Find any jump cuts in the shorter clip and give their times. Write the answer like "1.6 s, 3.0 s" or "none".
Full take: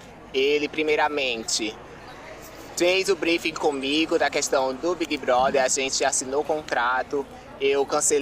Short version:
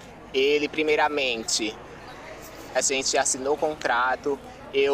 2.8 s